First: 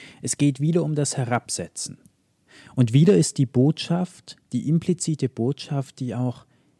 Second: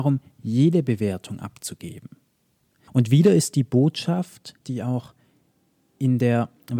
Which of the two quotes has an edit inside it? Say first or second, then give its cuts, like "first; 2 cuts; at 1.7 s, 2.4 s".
second; 2 cuts; at 2.9 s, 4.6 s